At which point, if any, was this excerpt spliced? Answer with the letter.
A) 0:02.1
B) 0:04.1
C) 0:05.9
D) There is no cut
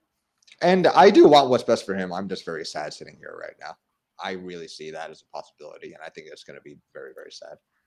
B